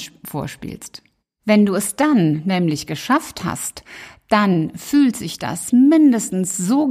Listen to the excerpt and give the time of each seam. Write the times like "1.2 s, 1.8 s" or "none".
4.3 s